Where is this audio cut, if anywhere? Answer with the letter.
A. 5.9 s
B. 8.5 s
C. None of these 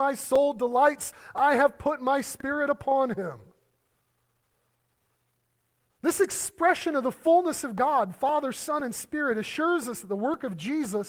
A